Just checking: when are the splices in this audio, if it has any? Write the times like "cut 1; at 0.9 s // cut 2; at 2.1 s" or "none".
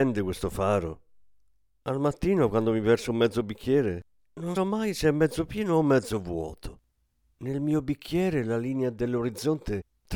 cut 1; at 4.6 s

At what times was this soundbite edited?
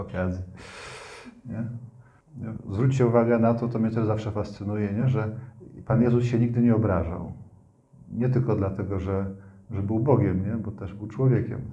none

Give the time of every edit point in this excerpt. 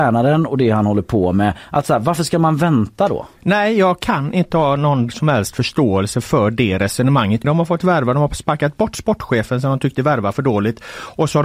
cut 1; at 7.4 s

